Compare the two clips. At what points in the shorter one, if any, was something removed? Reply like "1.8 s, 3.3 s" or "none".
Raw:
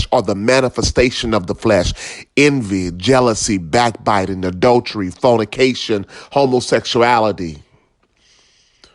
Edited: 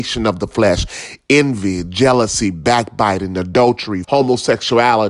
4.0 s